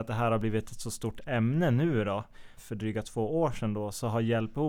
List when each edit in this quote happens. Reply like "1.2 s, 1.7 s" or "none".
2.6 s